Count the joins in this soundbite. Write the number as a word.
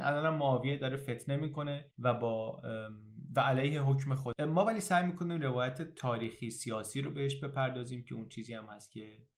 one